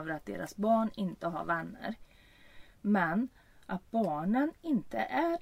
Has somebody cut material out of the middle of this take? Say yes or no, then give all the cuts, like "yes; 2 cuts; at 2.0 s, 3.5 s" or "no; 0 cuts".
no; 0 cuts